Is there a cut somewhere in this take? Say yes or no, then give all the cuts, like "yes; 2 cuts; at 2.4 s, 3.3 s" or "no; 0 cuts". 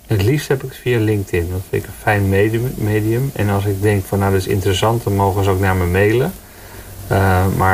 no; 0 cuts